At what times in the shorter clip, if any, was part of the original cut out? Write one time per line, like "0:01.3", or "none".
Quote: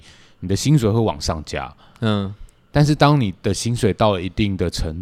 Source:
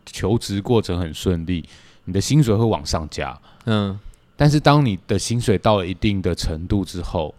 none